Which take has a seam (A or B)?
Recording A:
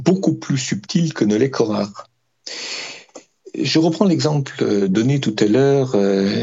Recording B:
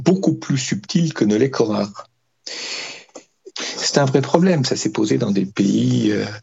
B